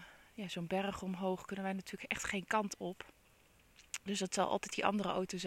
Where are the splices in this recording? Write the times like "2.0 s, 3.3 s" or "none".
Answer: none